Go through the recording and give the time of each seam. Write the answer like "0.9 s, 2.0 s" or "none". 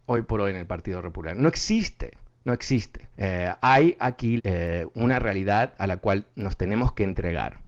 3.1 s, 4.4 s